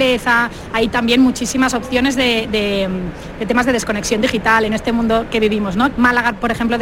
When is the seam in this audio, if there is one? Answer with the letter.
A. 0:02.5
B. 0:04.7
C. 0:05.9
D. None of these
C